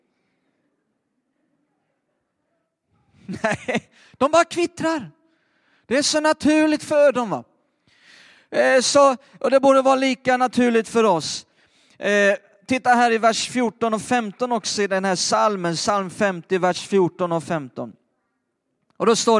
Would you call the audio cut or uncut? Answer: uncut